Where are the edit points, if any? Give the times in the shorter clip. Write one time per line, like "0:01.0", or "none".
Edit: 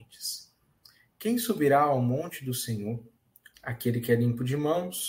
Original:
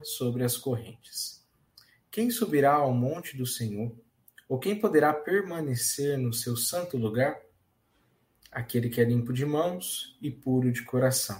0:03.5